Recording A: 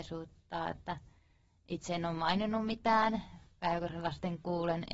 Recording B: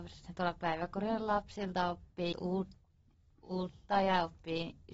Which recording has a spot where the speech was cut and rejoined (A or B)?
B